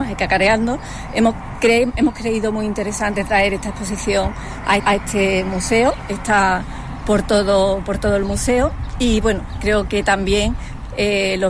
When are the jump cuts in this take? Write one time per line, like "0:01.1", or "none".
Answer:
0:04.8